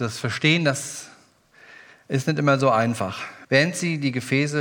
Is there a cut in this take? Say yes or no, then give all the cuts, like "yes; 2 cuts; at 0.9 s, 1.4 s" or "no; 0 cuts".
yes; 1 cut; at 3.4 s